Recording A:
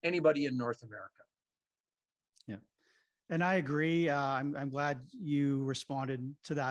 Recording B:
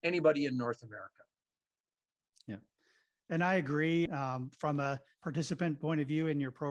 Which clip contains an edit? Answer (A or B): B